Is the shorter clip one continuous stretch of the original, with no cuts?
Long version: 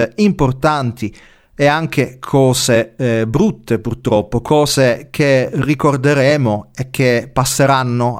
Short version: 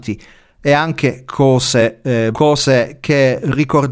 no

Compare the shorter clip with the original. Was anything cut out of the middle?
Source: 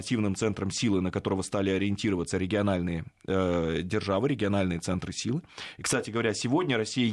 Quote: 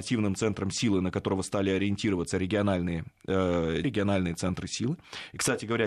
yes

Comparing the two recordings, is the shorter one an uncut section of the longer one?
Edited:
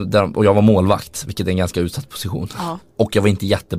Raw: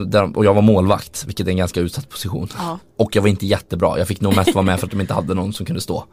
yes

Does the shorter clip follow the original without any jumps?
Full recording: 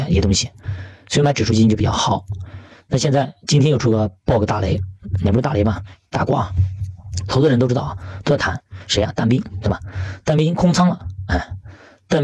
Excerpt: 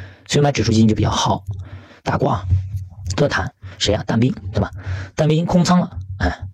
no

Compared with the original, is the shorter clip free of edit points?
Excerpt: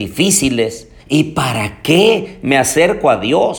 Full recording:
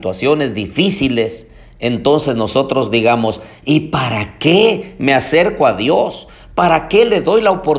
no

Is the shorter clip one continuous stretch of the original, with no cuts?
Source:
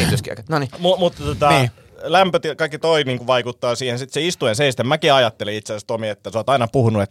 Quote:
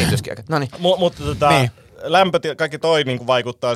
yes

